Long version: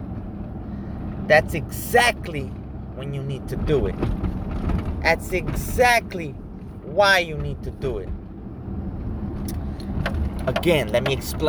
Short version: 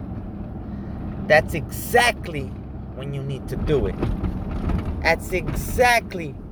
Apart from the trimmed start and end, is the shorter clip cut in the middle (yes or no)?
no